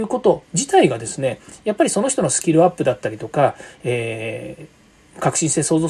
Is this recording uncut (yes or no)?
yes